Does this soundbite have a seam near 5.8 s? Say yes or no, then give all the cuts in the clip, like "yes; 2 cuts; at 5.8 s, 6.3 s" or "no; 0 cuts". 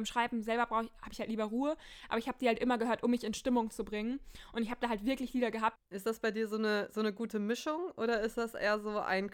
yes; 1 cut; at 5.8 s